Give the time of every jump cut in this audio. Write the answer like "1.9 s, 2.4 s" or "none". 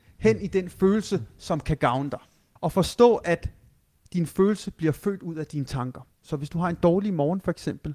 2.6 s, 6.1 s